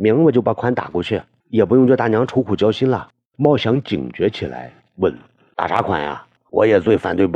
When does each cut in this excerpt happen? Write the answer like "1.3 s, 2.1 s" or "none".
3.3 s, 6.4 s

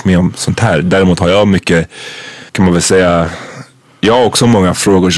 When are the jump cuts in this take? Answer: 2.5 s

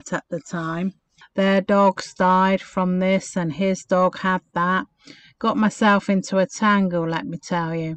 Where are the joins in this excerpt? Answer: 1.2 s

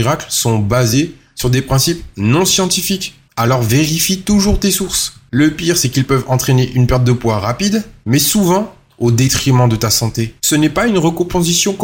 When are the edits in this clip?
10.4 s

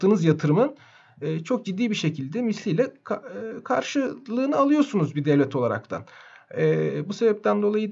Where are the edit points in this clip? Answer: none

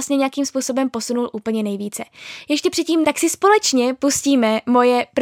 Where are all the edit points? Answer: 3.0 s

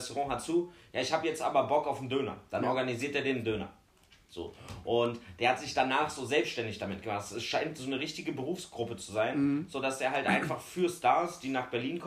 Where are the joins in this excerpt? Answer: none

